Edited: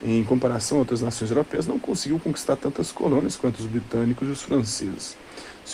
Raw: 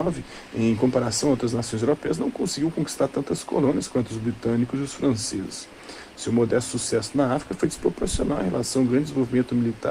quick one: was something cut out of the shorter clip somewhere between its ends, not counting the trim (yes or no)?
no